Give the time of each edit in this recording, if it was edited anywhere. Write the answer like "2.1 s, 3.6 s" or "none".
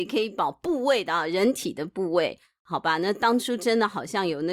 none